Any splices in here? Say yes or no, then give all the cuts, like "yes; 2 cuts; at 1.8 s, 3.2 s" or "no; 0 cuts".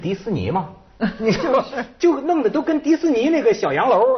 no; 0 cuts